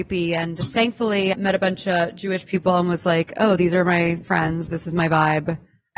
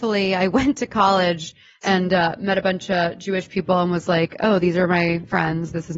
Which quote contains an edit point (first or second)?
first